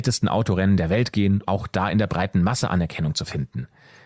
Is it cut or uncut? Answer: cut